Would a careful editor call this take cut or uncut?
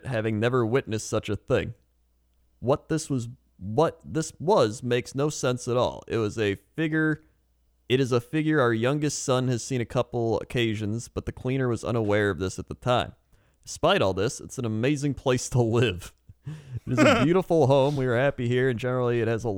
uncut